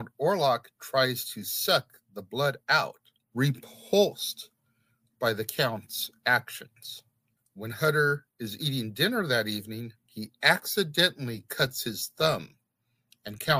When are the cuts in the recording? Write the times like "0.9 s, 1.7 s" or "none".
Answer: 3.2 s, 7.4 s, 10.0 s